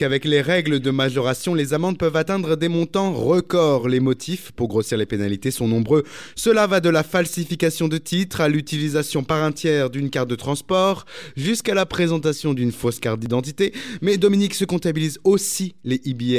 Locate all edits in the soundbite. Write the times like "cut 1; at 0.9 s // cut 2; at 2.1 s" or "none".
none